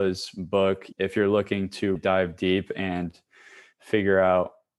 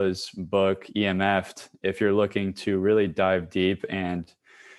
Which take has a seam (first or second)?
first